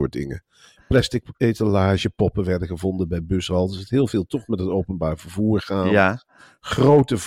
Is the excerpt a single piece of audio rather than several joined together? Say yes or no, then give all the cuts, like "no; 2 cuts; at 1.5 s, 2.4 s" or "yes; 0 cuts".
yes; 0 cuts